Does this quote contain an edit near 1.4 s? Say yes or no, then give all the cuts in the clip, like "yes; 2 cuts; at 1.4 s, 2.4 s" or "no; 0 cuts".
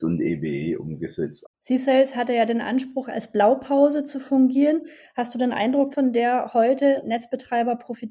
yes; 2 cuts; at 1.4 s, 5.9 s